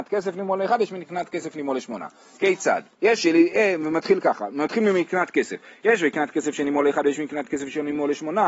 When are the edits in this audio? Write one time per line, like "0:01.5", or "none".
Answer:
0:02.9